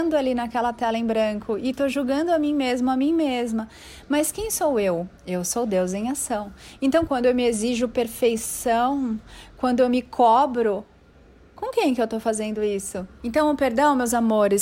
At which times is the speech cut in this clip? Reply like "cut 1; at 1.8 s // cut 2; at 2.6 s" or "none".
cut 1; at 5.2 s // cut 2; at 7.1 s // cut 3; at 13.2 s